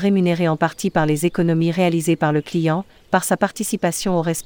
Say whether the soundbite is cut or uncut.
uncut